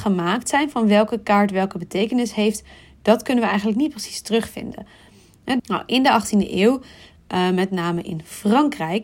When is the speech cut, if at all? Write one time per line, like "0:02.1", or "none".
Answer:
0:05.6